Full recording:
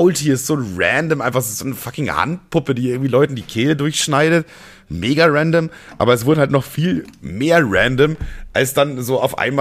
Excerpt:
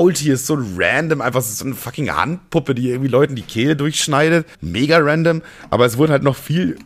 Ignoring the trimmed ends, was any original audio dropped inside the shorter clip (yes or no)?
yes